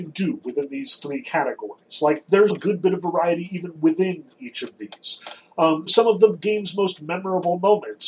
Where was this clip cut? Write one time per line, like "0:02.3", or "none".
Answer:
0:02.5
0:05.9